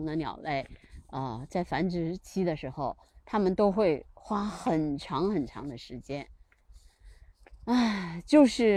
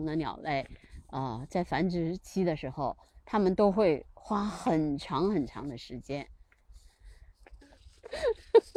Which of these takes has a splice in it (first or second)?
second